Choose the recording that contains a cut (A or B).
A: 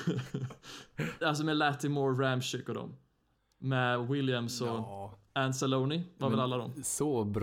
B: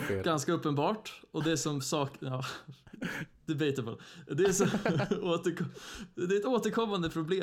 A